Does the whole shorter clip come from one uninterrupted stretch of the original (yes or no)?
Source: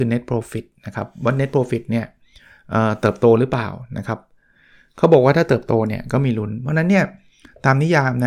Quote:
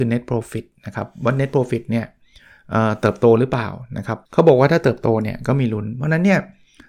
no